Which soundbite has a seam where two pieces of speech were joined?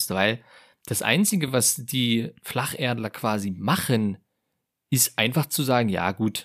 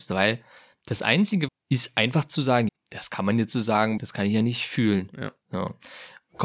second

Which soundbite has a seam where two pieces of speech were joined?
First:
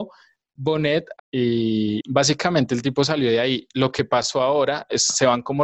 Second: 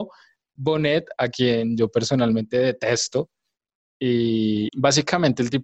first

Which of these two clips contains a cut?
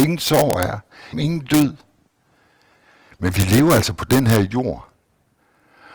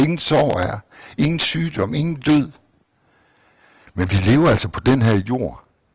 first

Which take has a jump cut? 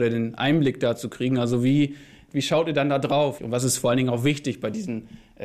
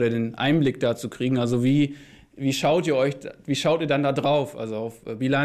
first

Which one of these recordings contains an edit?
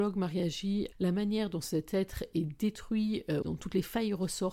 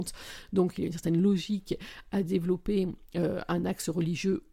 first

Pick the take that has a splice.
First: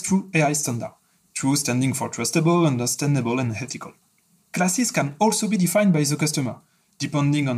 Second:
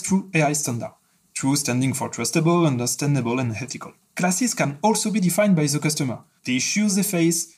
second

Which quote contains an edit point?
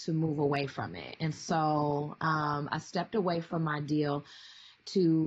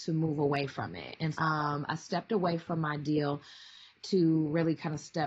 second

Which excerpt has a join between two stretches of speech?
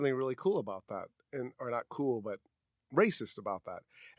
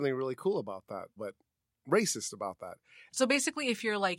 second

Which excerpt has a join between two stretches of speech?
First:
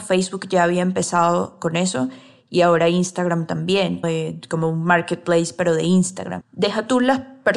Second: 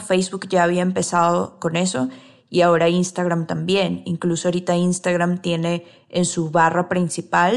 first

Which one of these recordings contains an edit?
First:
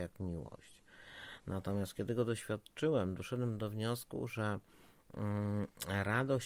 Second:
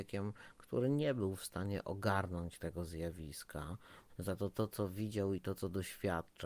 second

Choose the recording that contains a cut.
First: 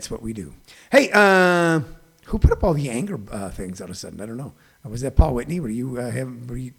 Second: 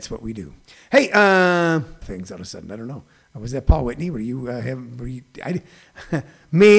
second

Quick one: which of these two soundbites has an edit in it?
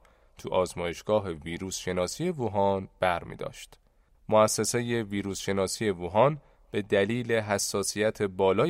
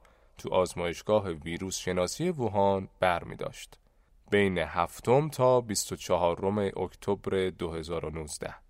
first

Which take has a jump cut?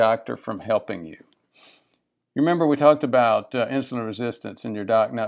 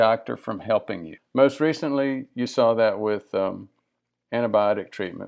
second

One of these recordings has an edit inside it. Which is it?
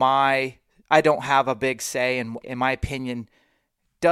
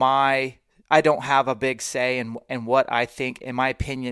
first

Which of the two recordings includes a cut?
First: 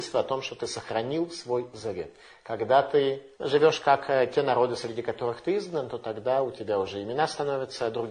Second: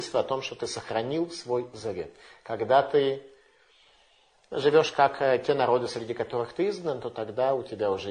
first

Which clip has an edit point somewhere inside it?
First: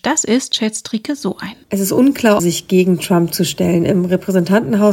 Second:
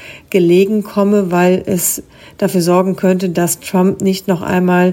first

